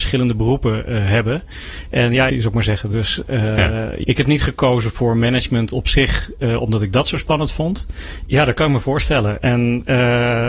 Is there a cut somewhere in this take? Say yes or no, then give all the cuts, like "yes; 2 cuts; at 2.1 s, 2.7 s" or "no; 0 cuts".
yes; 3 cuts; at 2.3 s, 4.0 s, 8.3 s